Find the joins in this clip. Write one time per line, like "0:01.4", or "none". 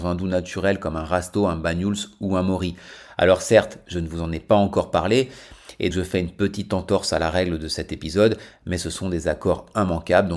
0:05.9